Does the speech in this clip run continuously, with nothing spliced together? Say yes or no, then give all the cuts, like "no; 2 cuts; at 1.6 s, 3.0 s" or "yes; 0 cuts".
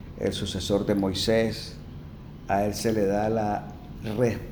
yes; 0 cuts